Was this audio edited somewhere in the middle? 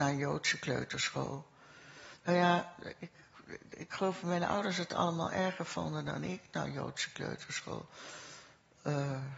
no; 0 cuts

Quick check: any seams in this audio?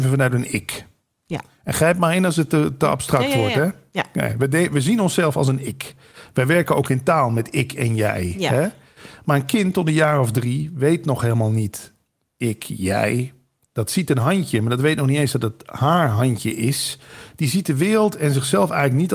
no; 0 cuts

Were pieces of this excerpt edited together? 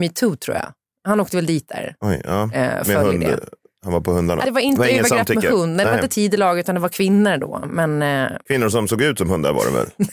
no; 0 cuts

